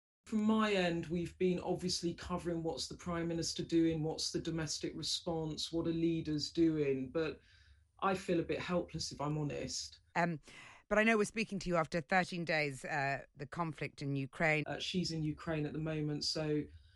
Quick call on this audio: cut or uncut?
cut